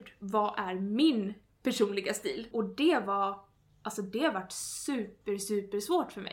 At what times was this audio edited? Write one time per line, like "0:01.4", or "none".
0:02.5